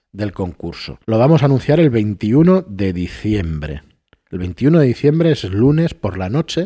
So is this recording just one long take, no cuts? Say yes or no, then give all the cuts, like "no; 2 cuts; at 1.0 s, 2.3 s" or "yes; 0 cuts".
no; 1 cut; at 1.0 s